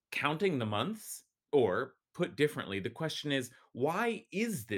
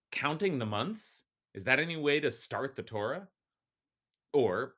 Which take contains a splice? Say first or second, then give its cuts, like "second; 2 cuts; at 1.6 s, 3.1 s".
first; 1 cut; at 1.4 s